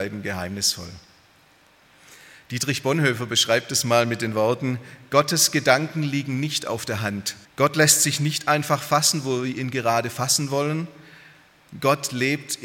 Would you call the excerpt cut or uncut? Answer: cut